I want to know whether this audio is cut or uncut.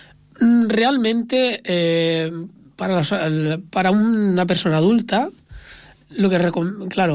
uncut